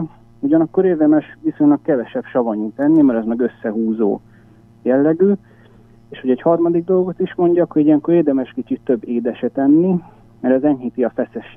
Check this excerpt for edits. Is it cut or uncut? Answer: uncut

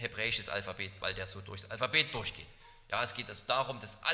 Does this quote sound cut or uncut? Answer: cut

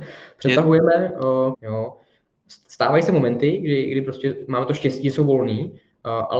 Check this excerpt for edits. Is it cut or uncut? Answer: cut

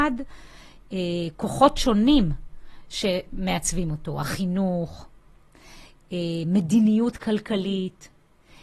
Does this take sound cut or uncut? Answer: uncut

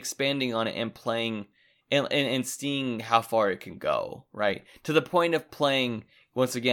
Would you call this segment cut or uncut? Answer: uncut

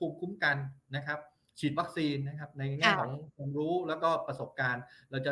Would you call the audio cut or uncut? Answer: uncut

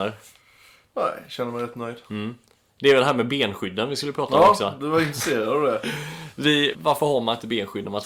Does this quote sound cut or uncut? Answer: cut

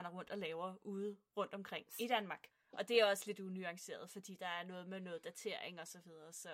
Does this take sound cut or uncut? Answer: cut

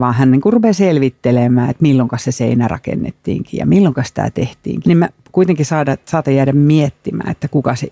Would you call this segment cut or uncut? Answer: cut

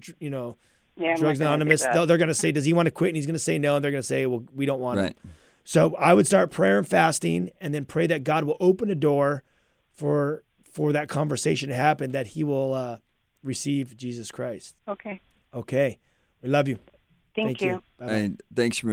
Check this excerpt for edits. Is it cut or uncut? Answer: cut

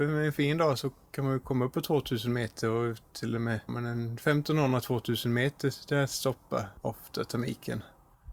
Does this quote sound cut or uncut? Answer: cut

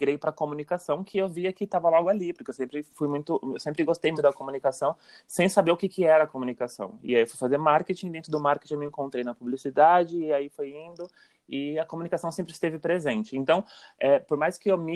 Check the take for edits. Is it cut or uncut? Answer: cut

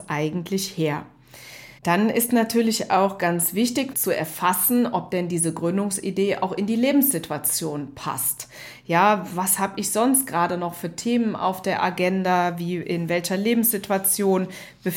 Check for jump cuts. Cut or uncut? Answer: cut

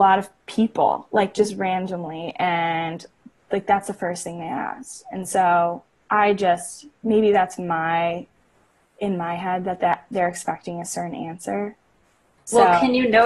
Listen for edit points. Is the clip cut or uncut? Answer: uncut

